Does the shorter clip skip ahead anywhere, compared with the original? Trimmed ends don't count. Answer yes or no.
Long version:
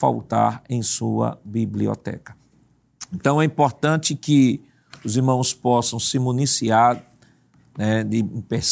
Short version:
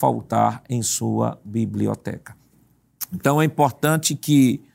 no